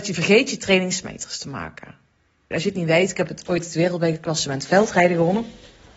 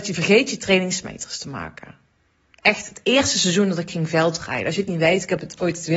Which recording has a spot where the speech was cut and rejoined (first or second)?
first